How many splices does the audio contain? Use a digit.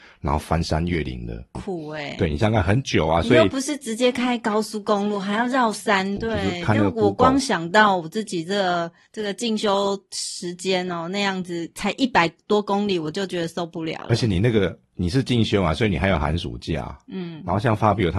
2